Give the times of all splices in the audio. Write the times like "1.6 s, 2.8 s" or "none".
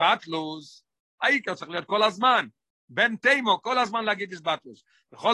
none